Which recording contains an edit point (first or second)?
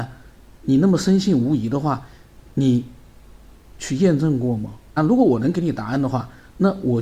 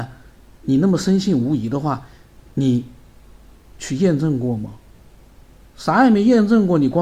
first